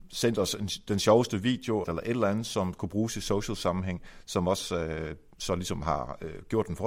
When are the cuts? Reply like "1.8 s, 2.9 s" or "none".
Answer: 1.8 s